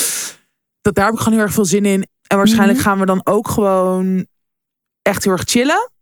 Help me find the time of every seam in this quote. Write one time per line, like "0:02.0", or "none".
0:02.1